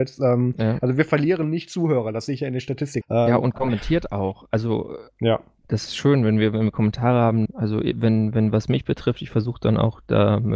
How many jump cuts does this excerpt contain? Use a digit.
2